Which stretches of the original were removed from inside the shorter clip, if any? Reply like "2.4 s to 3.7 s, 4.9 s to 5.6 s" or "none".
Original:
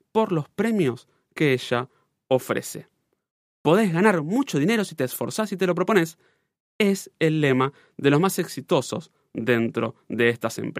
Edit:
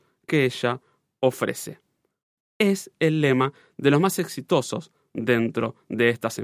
3.5 s to 6.6 s